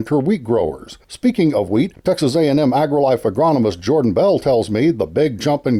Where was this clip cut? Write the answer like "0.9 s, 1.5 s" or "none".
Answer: 1.0 s